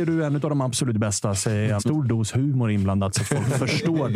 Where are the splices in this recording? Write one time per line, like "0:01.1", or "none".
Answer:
0:01.8